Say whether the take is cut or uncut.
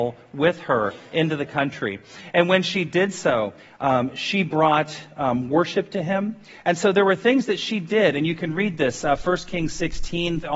uncut